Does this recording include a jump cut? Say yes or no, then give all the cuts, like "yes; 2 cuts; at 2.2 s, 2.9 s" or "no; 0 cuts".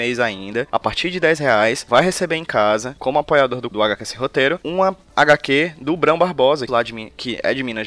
yes; 1 cut; at 6.7 s